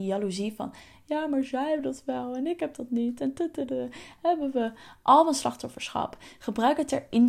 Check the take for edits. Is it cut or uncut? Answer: uncut